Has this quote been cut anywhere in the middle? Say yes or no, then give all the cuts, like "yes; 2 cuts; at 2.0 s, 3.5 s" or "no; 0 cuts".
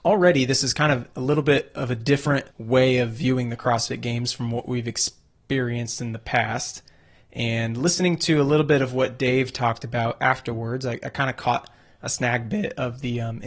yes; 1 cut; at 2.5 s